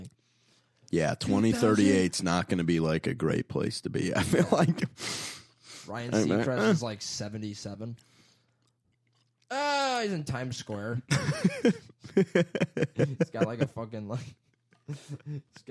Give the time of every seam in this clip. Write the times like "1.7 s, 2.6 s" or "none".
none